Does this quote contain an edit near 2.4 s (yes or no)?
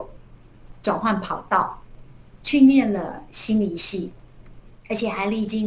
no